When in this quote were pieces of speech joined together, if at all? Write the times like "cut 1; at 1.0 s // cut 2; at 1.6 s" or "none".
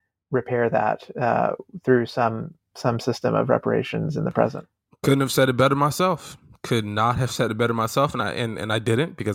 none